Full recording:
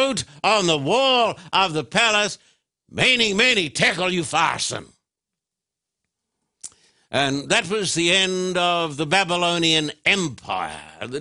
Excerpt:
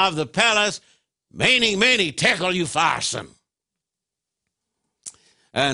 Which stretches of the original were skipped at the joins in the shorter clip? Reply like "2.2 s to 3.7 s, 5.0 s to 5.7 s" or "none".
none